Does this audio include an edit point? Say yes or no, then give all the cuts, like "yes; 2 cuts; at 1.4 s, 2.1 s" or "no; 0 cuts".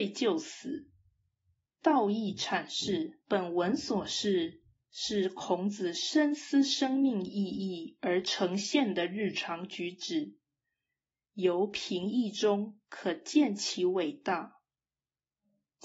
yes; 2 cuts; at 1.6 s, 3.2 s